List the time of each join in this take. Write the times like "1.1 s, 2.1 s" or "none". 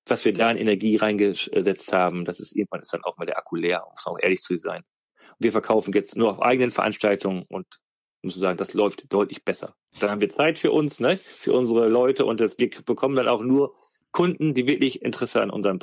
none